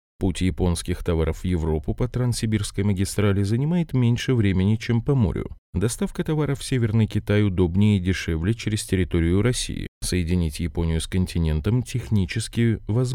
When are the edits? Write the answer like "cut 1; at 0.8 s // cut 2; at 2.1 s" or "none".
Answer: none